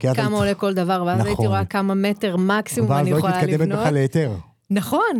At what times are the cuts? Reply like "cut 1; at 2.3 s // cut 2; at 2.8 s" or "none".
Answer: none